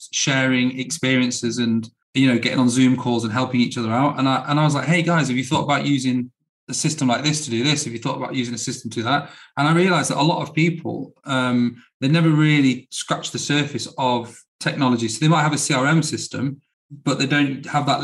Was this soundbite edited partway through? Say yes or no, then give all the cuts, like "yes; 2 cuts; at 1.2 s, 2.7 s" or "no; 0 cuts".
yes; 1 cut; at 14.5 s